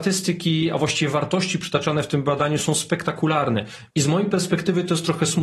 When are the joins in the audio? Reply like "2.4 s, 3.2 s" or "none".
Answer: 3.9 s